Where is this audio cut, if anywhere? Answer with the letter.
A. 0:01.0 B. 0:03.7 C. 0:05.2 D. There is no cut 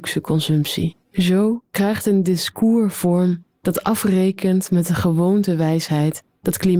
A